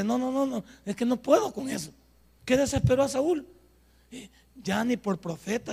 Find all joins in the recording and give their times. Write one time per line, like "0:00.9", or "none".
0:02.4

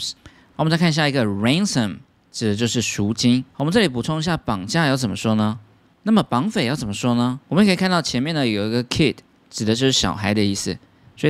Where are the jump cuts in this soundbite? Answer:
0:05.9
0:07.4

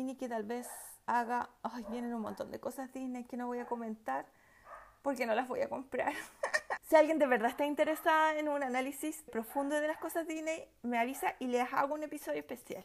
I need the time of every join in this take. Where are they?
0:06.8
0:09.3

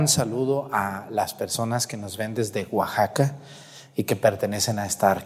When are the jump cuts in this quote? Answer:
none

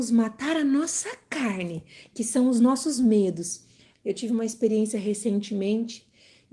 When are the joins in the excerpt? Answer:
0:03.9

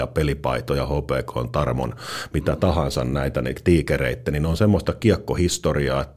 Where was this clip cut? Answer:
none

